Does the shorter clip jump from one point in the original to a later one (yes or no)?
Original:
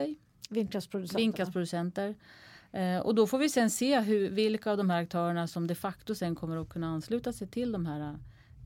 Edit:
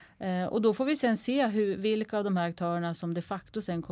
no